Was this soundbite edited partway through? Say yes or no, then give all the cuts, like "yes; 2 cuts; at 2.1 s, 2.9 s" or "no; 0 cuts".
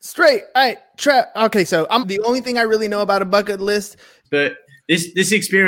yes; 2 cuts; at 2.0 s, 4.2 s